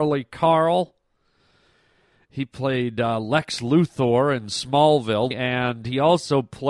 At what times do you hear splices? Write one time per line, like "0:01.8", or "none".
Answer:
0:02.3
0:05.3